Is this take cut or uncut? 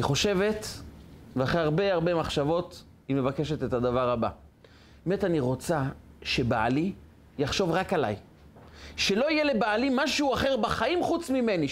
uncut